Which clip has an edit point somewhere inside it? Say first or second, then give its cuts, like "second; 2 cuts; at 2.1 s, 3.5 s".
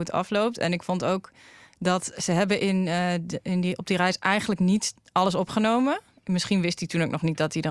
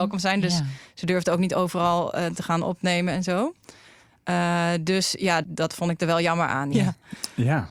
second; 2 cuts; at 5.4 s, 6.7 s